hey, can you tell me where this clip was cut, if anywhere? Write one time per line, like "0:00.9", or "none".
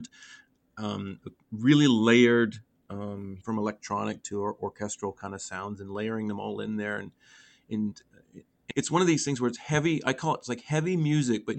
0:03.4
0:08.7